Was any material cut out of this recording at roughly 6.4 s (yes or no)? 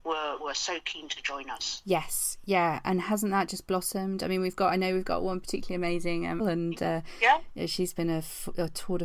yes